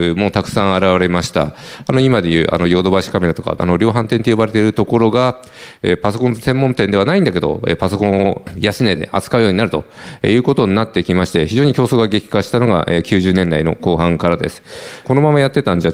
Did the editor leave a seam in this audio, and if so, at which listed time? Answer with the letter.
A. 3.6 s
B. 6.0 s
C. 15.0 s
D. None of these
A